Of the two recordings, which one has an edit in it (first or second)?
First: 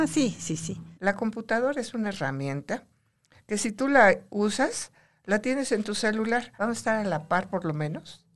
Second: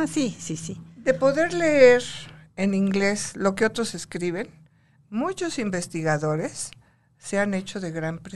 first